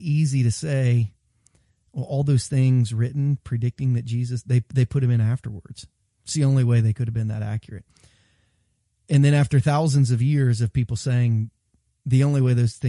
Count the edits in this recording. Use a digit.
0